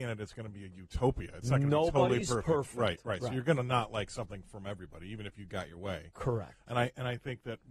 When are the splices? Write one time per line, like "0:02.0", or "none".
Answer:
none